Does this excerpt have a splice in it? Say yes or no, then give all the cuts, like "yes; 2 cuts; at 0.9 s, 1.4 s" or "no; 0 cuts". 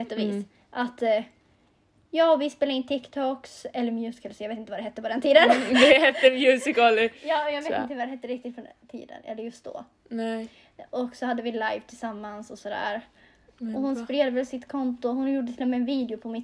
no; 0 cuts